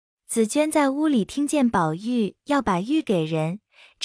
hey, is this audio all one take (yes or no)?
yes